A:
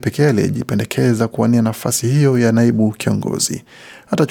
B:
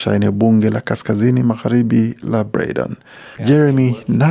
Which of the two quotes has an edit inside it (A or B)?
B